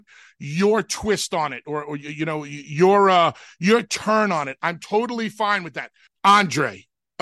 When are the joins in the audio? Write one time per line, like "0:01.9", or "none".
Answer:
0:06.1